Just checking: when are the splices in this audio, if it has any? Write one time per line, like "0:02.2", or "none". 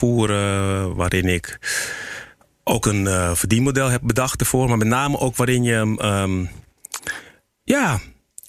none